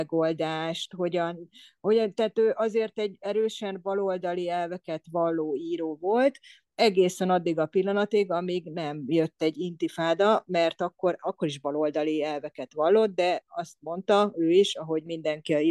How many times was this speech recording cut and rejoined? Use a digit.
0